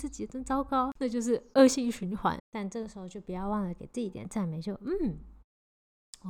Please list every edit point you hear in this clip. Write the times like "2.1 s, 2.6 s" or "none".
2.4 s